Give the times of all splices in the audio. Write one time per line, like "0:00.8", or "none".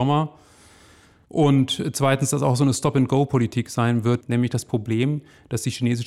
0:04.2

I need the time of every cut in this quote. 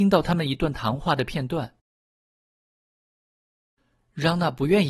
none

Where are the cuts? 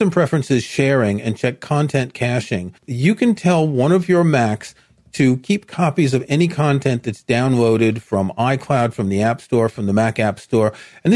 0:02.8

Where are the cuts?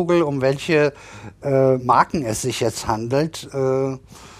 none

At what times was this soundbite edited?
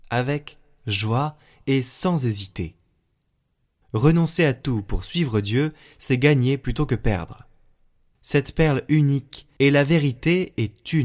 0:03.8
0:08.1
0:09.6

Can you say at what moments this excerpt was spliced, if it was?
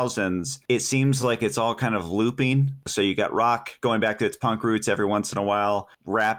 none

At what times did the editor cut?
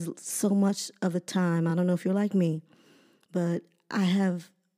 none

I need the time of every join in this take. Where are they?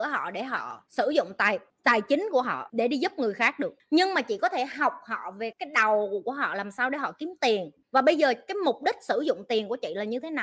0:05.5

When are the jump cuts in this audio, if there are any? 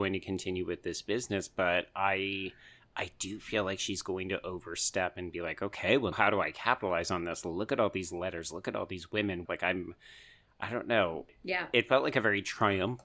0:06.1
0:09.4

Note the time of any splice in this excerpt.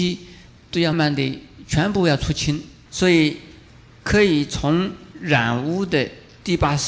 0:00.9
0:02.9

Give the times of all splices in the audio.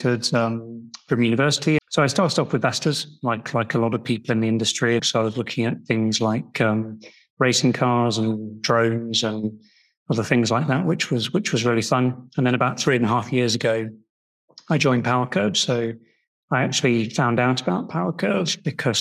0:01.8
0:05.0

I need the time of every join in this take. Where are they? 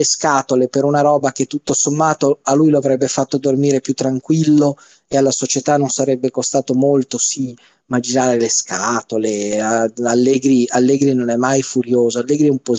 none

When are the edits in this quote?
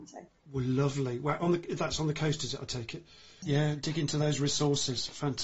0:03.4

